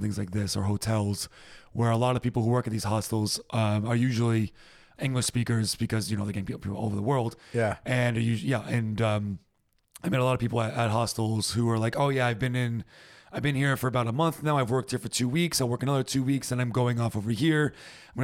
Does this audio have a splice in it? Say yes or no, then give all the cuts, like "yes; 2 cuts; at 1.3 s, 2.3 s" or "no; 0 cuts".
no; 0 cuts